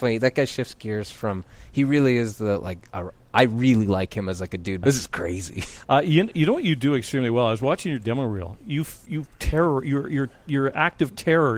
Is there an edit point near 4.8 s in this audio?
yes; 1 cut; at 4.8 s

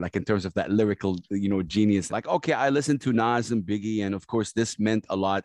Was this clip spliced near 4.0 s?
no; 1 cut; at 2.1 s

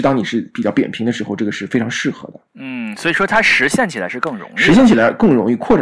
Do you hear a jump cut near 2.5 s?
yes; 1 cut; at 2.5 s

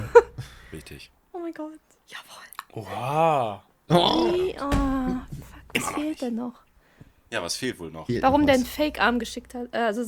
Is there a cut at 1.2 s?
no; 1 cut; at 3.9 s

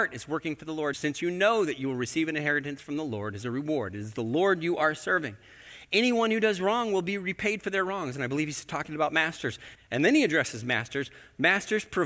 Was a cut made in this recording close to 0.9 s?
yes; 2 cuts; at 0.9 s, 9.8 s

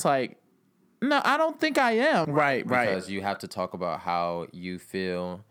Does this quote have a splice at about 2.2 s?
yes; 1 cut; at 2.2 s

